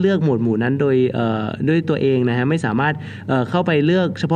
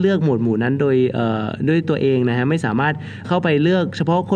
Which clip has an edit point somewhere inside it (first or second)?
second